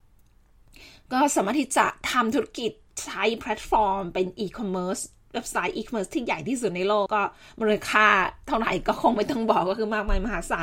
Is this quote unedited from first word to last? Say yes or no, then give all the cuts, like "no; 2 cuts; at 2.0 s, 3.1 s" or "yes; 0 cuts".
no; 1 cut; at 7.1 s